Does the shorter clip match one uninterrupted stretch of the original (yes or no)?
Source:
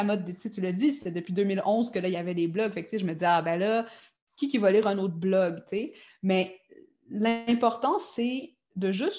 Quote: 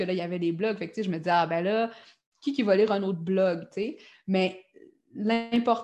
yes